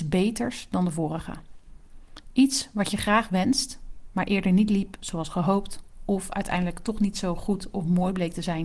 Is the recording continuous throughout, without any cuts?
yes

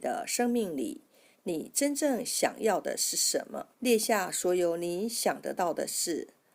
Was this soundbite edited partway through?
yes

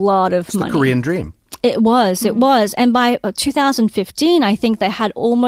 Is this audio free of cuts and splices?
yes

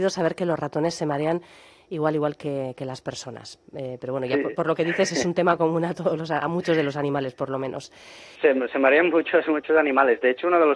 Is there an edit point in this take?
no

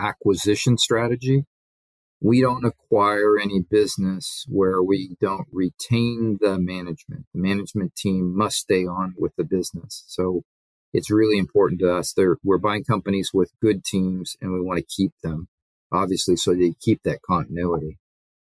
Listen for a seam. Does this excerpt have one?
no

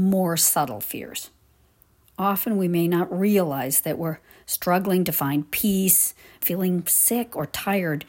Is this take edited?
yes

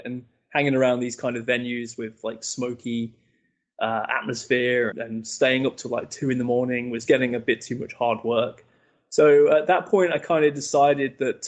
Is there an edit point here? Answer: yes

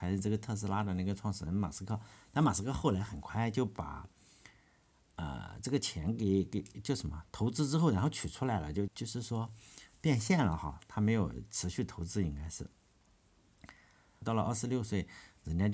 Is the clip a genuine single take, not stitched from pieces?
no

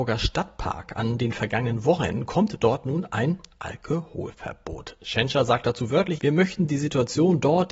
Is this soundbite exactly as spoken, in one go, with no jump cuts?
no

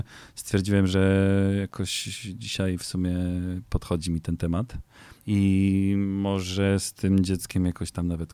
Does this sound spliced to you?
yes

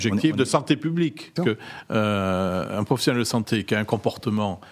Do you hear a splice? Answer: yes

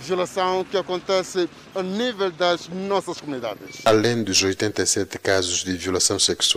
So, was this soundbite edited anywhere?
no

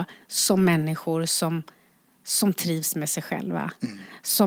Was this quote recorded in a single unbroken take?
yes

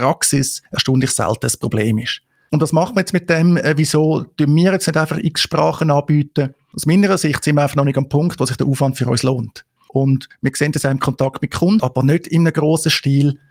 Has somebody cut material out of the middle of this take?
yes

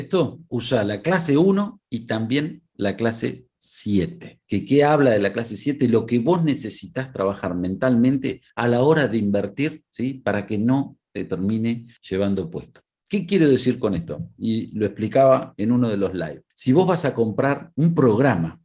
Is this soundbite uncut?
yes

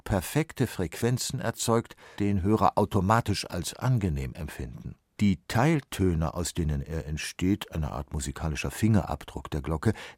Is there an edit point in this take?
yes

